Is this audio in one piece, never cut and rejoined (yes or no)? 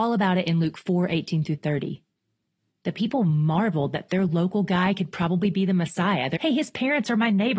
no